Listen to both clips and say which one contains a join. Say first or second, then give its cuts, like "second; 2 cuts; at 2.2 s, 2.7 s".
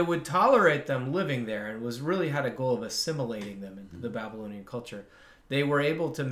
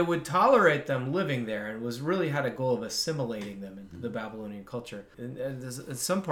second; 1 cut; at 5.1 s